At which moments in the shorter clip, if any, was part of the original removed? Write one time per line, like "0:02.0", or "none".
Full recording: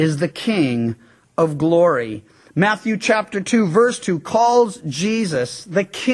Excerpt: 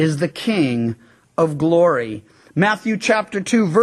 none